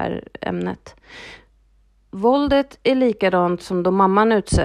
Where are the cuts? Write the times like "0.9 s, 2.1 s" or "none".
none